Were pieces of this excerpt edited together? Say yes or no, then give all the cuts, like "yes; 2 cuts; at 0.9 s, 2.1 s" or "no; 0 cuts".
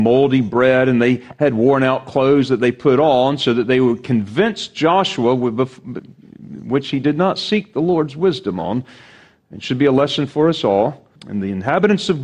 yes; 1 cut; at 11.2 s